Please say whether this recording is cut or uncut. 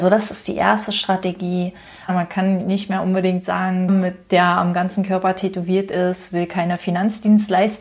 cut